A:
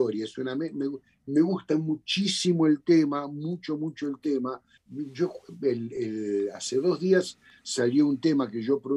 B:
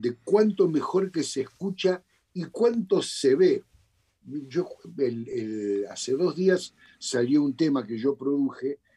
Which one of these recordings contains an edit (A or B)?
A